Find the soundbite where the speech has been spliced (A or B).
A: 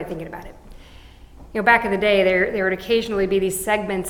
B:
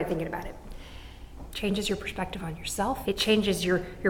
B